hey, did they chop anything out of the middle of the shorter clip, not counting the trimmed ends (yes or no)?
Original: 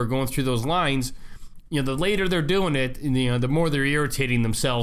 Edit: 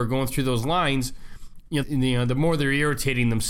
yes